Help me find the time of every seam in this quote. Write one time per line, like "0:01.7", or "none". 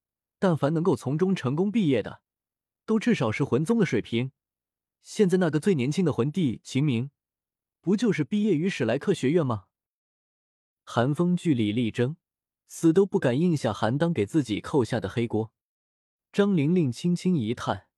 0:16.2

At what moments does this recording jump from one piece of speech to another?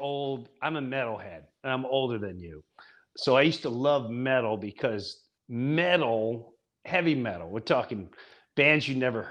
0:05.4

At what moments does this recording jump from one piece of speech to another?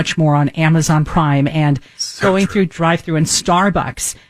none

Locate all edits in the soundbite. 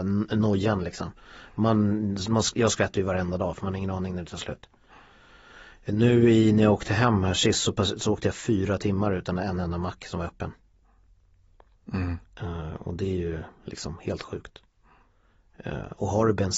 none

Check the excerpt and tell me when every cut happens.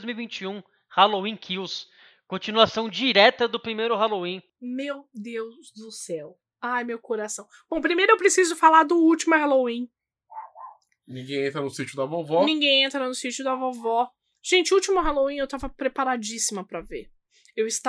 none

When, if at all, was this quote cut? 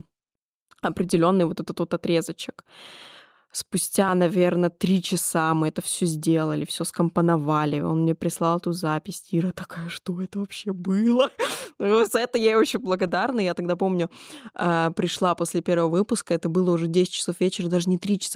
none

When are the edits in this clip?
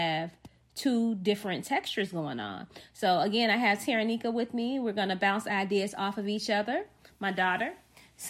none

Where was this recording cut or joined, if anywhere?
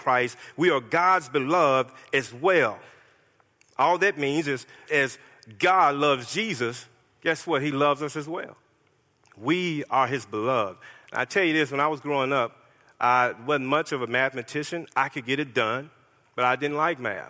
0:04.9

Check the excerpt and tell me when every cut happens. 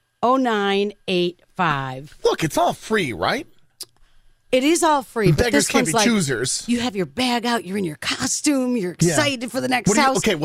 none

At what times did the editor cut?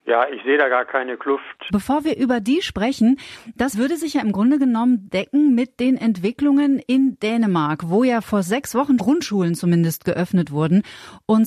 0:01.7
0:03.7
0:09.0

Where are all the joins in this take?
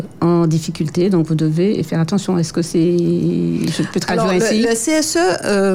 none

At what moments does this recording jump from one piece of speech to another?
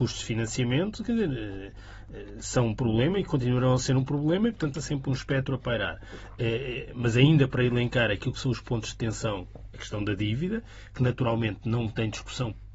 0:04.7

